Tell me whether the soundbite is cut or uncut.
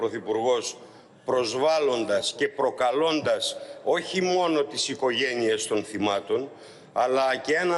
uncut